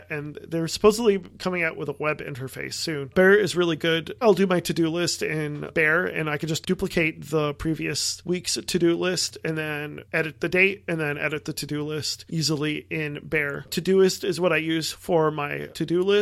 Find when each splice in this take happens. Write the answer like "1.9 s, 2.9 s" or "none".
4.2 s

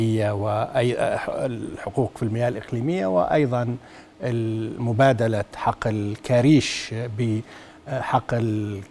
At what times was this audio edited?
none

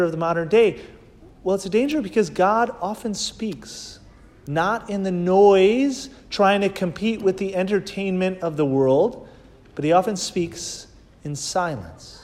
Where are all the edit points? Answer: none

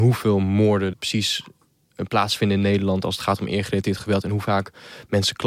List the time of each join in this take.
0.9 s

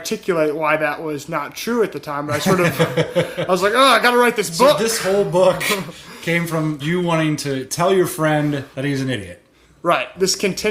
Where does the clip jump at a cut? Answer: none

